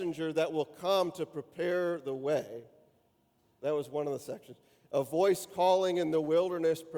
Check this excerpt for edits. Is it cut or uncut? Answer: uncut